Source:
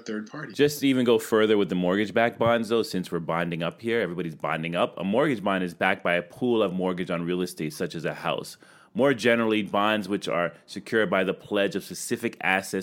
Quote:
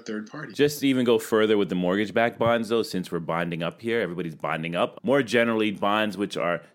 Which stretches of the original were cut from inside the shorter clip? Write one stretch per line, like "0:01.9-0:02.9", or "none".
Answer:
0:05.0-0:08.9